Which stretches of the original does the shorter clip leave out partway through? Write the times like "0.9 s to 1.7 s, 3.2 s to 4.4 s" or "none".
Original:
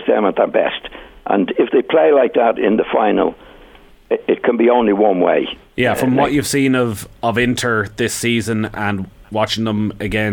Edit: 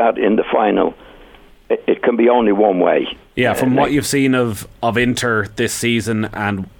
none

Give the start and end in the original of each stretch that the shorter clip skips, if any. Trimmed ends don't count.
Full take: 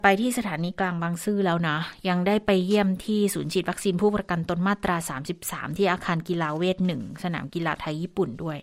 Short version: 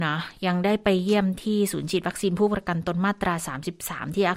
none

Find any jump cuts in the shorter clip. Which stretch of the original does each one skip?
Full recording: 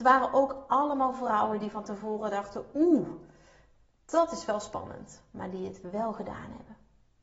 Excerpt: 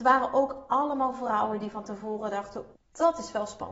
2.7 s to 3.9 s

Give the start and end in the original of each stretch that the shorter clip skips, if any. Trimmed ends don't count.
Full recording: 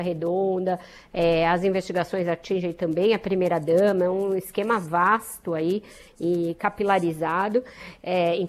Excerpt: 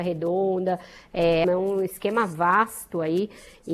1.4 s to 4.0 s

